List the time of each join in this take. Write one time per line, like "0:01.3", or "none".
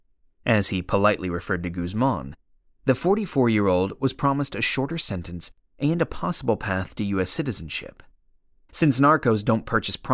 0:08.5